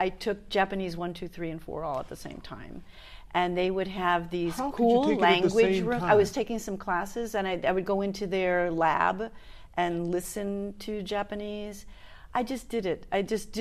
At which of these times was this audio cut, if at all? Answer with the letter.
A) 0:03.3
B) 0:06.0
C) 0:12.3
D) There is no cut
D